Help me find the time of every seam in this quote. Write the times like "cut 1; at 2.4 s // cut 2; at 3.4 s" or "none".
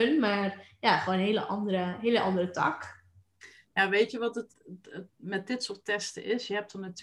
cut 1; at 4.5 s